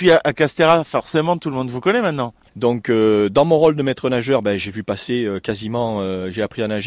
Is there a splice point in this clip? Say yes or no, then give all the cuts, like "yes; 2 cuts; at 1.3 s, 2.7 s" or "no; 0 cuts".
yes; 1 cut; at 2.5 s